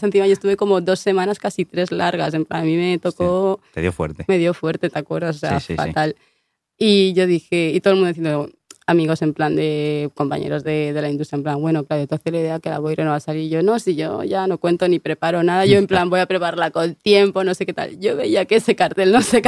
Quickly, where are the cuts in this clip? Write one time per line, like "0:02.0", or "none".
none